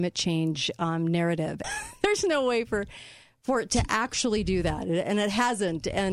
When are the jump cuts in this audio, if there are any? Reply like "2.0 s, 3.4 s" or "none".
1.6 s